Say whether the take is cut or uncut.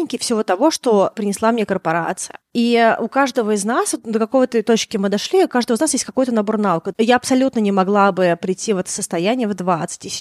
cut